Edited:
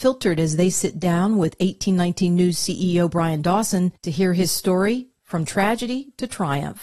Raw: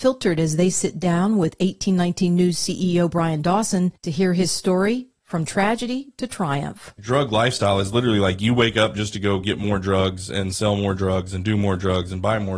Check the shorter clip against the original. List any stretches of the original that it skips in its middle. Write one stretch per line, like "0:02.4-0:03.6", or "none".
none